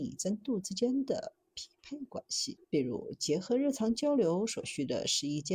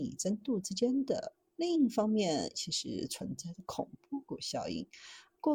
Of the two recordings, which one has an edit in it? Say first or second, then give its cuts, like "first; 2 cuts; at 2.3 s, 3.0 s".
second; 2 cuts; at 1.5 s, 2.5 s